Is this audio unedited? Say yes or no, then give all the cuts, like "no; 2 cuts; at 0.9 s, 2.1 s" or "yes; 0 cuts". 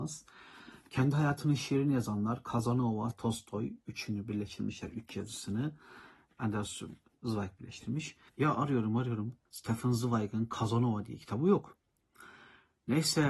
no; 3 cuts; at 3.1 s, 8.3 s, 9.5 s